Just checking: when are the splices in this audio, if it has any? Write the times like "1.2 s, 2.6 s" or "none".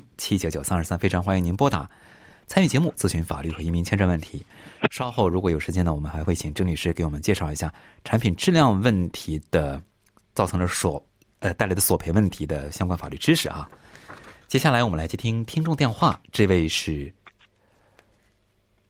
none